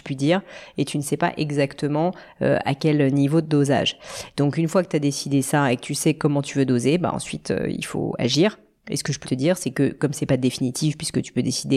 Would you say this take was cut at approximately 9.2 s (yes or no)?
yes